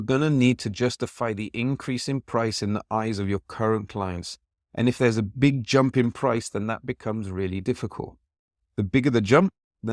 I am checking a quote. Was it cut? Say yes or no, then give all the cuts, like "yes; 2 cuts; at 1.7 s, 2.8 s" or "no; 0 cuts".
no; 0 cuts